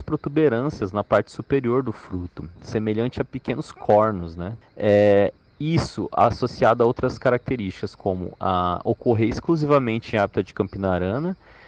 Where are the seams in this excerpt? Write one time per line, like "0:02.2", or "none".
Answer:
0:04.6